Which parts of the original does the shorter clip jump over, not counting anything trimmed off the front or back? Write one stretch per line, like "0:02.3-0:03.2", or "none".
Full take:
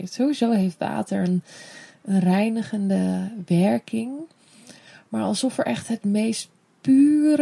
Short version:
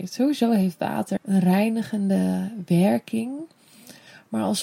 0:01.2-0:02.0